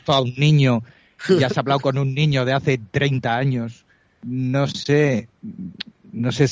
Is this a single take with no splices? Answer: yes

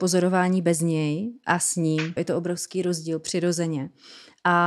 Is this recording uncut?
no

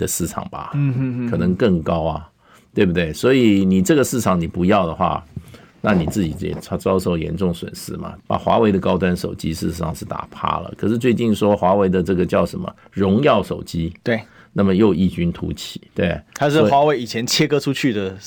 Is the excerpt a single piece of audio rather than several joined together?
no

